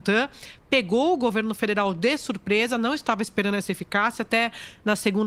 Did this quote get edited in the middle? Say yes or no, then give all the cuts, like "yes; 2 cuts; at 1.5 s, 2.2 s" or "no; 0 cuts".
no; 0 cuts